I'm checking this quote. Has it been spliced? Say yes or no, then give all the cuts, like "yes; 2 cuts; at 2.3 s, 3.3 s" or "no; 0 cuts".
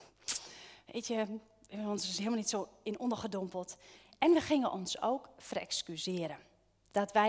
no; 0 cuts